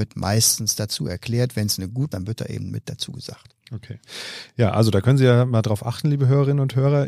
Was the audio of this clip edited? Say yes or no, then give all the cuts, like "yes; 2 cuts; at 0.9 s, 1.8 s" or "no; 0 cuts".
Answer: yes; 1 cut; at 2.1 s